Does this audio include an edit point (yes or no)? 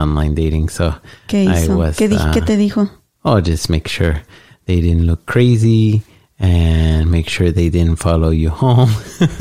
no